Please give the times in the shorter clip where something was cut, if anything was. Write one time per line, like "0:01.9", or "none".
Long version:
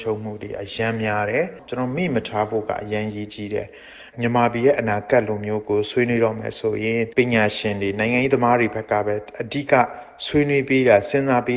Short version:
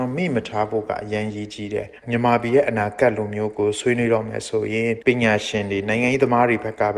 0:02.0